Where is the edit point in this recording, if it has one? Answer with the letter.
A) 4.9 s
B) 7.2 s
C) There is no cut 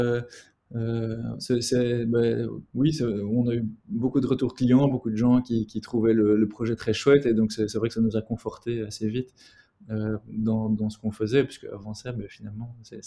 A